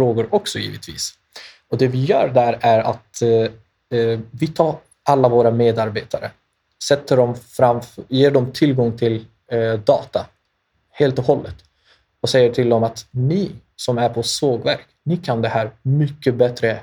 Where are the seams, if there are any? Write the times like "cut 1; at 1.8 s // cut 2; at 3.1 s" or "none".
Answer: none